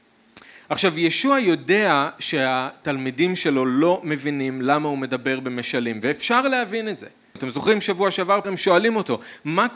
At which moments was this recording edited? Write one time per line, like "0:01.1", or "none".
0:07.4
0:08.4